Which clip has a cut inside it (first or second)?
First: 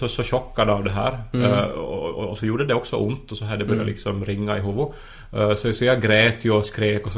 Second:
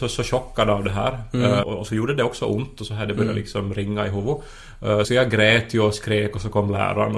second